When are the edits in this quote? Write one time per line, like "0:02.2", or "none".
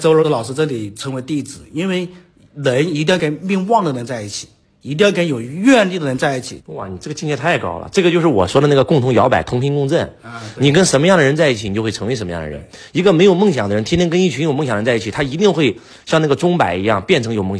0:06.6